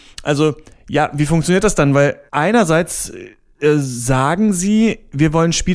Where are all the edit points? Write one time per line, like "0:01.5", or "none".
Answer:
0:02.3